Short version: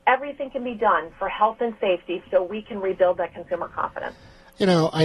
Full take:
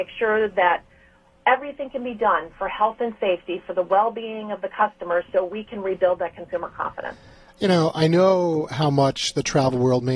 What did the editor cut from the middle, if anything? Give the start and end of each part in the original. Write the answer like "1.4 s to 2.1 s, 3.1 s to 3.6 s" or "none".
3.6 s to 5.3 s